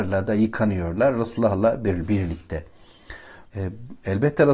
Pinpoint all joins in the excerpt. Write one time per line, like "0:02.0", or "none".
0:03.5